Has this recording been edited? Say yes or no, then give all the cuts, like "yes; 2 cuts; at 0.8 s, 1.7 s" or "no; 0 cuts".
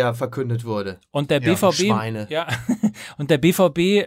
no; 0 cuts